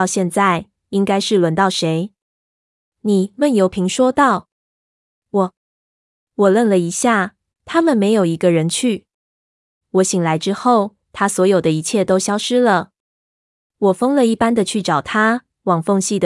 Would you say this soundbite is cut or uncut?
cut